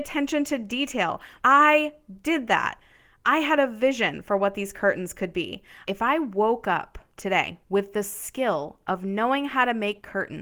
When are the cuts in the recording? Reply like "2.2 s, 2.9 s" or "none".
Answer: 1.4 s, 5.9 s